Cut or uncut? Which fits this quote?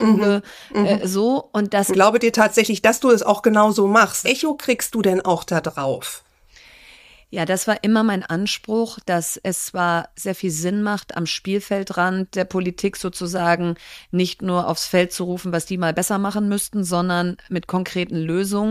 cut